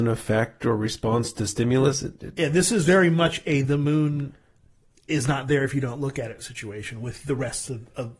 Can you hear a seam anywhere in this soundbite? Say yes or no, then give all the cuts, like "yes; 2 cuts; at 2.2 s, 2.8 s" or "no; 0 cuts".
no; 0 cuts